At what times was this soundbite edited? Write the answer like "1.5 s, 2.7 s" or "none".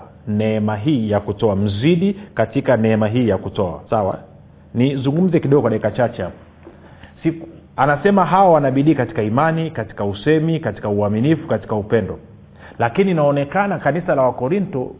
3.9 s, 7.6 s